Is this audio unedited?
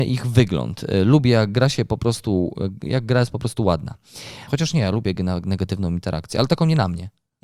no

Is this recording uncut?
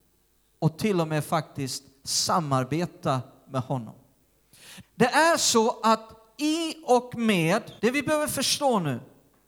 no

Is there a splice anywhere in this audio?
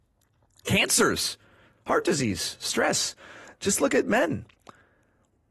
no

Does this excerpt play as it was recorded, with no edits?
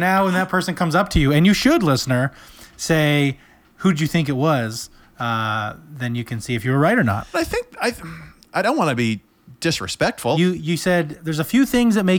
no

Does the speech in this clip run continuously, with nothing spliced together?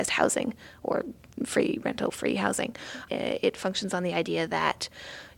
no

